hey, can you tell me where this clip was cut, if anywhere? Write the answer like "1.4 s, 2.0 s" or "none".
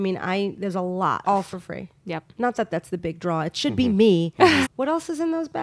1.2 s, 4.6 s